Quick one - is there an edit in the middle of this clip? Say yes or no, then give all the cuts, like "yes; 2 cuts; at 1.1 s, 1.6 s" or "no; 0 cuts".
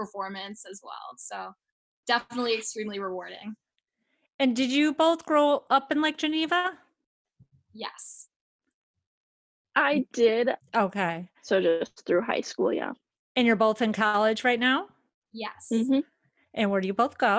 yes; 1 cut; at 10.6 s